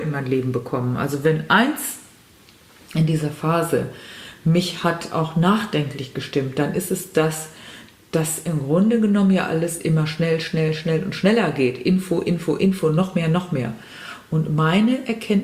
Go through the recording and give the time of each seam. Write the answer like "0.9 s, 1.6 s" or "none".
none